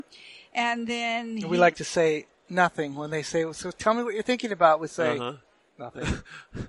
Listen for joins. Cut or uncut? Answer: uncut